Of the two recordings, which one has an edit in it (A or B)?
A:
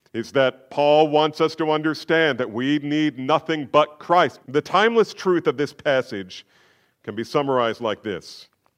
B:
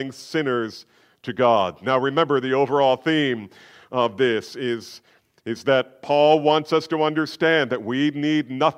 A